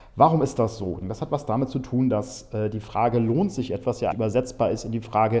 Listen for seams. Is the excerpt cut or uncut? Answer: cut